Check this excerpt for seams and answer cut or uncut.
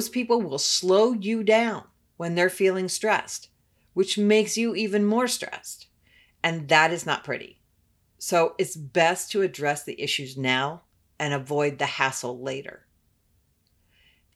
uncut